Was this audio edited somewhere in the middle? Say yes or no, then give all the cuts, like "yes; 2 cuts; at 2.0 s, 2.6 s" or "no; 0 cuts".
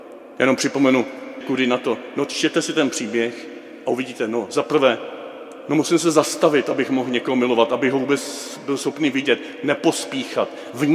yes; 1 cut; at 1.4 s